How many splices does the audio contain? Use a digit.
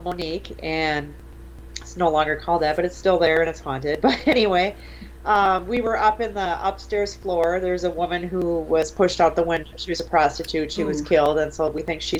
0